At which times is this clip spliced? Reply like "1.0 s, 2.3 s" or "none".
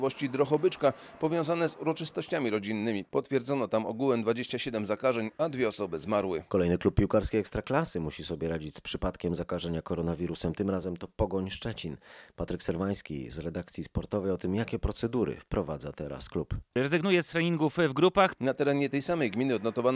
18.4 s